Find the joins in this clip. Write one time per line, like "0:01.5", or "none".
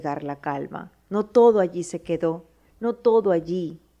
none